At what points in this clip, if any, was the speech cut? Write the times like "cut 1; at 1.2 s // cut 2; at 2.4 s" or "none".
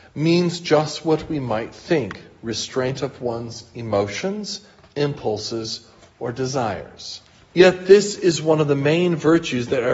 cut 1; at 7.5 s